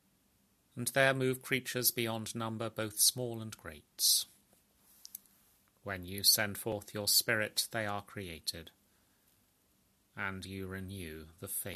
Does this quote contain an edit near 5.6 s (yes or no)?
yes